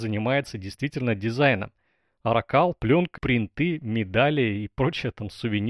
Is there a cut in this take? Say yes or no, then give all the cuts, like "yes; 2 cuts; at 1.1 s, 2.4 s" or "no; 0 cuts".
yes; 1 cut; at 3.2 s